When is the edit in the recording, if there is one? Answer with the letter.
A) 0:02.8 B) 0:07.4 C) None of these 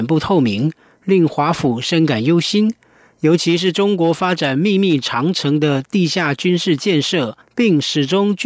B